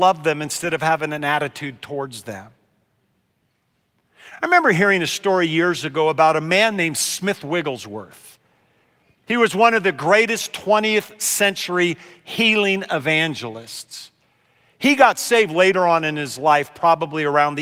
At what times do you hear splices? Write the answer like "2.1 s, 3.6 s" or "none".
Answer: none